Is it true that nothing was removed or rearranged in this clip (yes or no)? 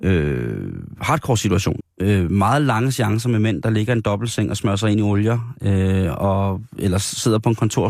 no